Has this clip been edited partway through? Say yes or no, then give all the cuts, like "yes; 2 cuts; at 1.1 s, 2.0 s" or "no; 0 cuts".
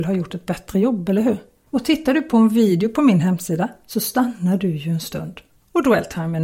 yes; 1 cut; at 1.7 s